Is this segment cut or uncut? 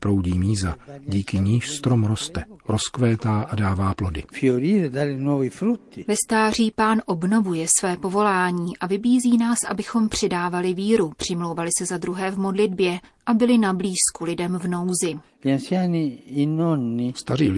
uncut